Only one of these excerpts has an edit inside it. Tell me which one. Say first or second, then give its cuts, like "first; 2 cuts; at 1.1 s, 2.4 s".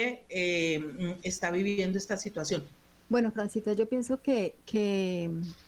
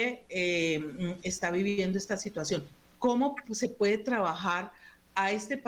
first; 1 cut; at 2.9 s